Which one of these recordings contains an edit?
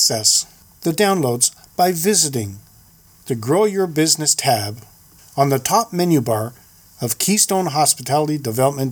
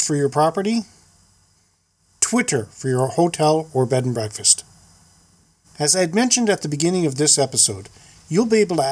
second; 1 cut; at 5.6 s

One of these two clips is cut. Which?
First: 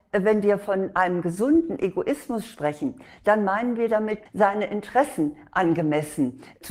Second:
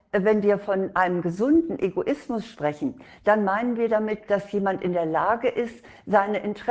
first; 1 cut; at 4.3 s

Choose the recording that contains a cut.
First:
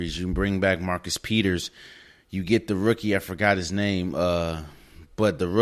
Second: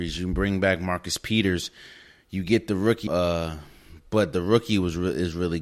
second; 1 cut; at 3.1 s

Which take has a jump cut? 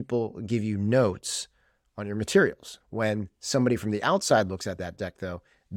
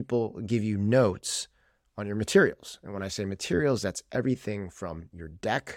first; 1 cut; at 2.8 s

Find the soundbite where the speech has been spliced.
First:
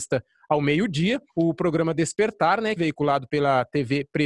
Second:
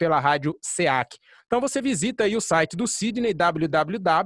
first; 2 cuts; at 1.3 s, 2.8 s

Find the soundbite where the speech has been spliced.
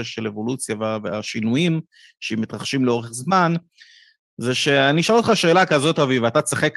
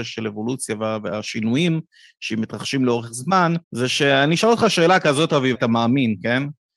second; 2 cuts; at 3.6 s, 5.5 s

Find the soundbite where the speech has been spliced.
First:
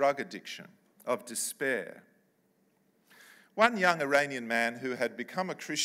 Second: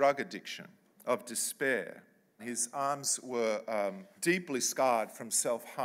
second; 2 cuts; at 2.4 s, 4.2 s

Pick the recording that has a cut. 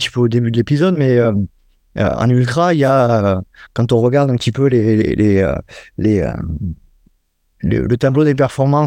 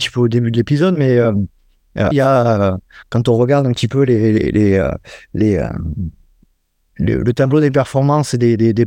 second; 1 cut; at 2.1 s

